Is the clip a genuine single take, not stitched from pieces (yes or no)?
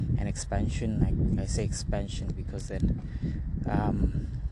yes